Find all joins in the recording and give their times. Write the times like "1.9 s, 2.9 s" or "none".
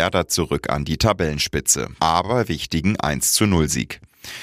2.0 s